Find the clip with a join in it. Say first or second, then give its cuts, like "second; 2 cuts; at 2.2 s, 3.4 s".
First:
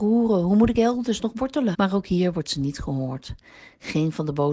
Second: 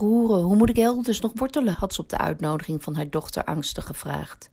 first; 1 cut; at 1.7 s